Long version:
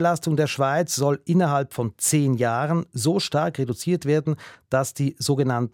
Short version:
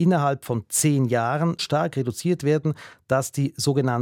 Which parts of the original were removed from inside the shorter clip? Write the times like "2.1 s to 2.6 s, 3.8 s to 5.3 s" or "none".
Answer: 2.9 s to 3.2 s

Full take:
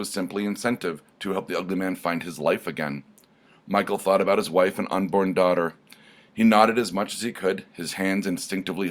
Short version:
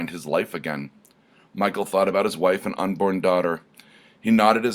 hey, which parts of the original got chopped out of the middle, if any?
none

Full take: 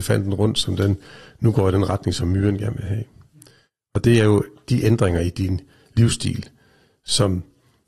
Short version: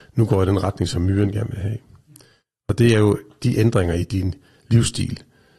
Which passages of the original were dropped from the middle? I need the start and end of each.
none

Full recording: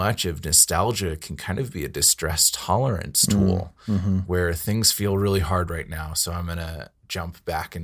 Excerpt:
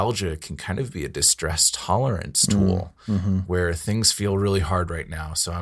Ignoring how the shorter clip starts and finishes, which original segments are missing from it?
none

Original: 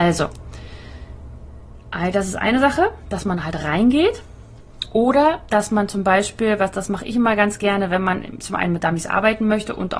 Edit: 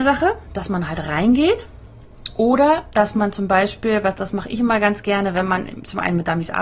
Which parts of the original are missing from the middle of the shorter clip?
none

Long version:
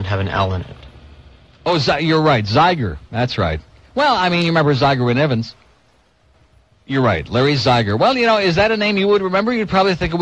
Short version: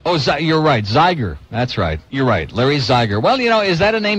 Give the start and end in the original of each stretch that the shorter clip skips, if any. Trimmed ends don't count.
3.7 s to 6.8 s

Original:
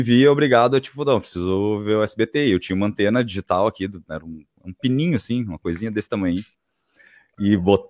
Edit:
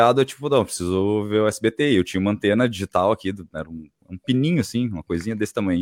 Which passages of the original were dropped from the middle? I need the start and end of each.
none

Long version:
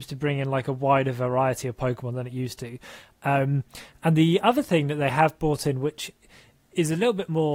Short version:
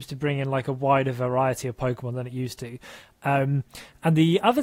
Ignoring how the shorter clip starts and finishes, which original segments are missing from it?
none

